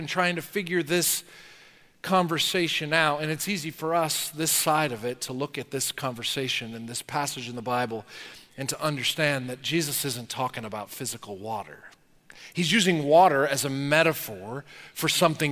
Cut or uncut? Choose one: uncut